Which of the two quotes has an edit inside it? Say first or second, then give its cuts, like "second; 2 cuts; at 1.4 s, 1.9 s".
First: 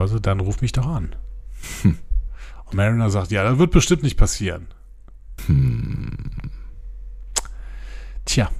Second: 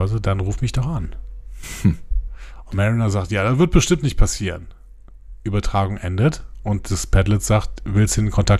first; 1 cut; at 5.4 s